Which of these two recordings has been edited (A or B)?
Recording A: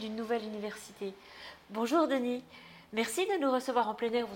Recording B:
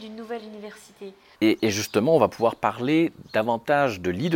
B